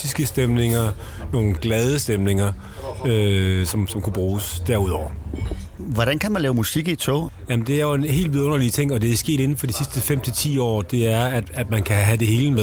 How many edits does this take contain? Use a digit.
0